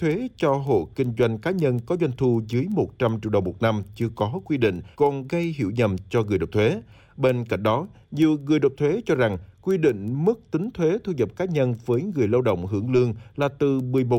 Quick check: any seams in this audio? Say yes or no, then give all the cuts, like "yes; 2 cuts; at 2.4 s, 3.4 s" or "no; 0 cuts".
yes; 1 cut; at 4.9 s